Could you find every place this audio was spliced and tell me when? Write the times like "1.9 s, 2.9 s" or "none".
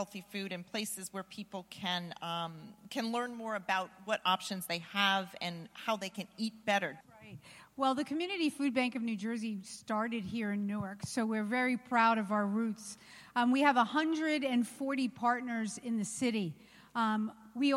7.0 s